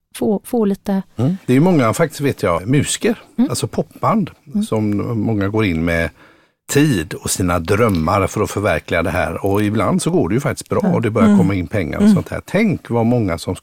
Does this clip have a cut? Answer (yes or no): yes